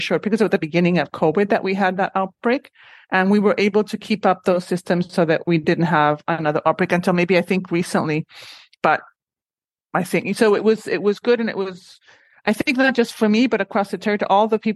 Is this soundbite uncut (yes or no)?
yes